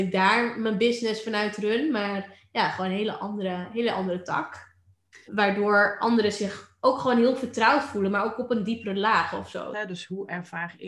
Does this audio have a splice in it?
yes; 2 cuts; at 5.3 s, 9.7 s

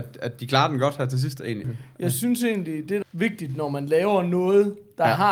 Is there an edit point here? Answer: yes; 2 cuts; at 1.6 s, 3.0 s

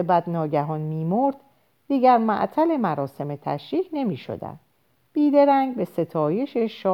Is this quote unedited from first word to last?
yes; 0 cuts

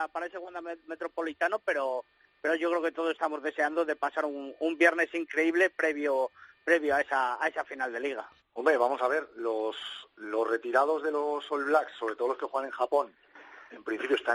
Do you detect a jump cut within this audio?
yes; 1 cut; at 8.4 s

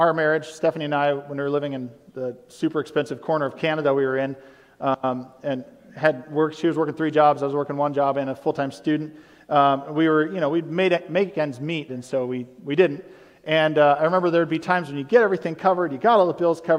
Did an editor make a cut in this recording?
yes; 1 cut; at 11.9 s

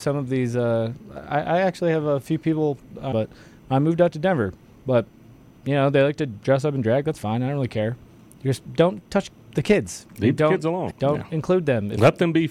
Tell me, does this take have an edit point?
yes; 3 cuts; at 3.1 s, 4.7 s, 10.9 s

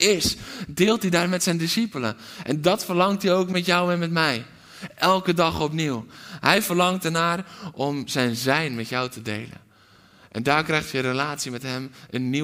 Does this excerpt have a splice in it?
no; 0 cuts

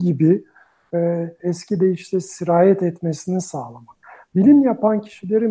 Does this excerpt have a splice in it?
yes; 1 cut; at 1.4 s

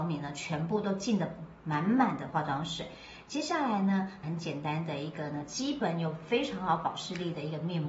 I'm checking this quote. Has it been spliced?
yes; 1 cut; at 4.2 s

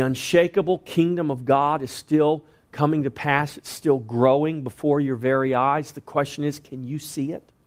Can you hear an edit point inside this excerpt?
no; 0 cuts

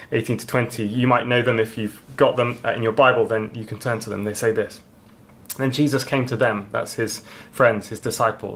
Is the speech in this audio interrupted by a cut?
no; 0 cuts

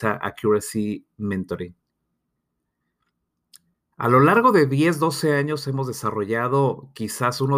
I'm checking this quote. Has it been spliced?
yes; 1 cut; at 3.9 s

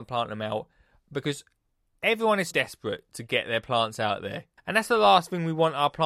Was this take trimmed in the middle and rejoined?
yes; 2 cuts; at 2.5 s, 4.6 s

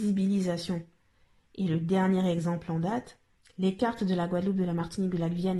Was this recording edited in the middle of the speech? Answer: no; 0 cuts

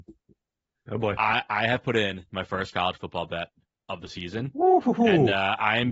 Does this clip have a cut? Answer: no; 0 cuts

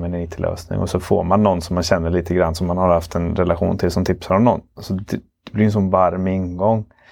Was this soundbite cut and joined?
no; 0 cuts

